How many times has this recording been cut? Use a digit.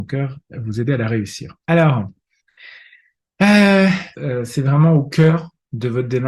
2